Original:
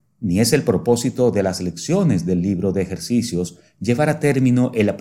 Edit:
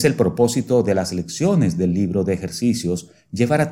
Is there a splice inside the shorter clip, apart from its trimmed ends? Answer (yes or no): no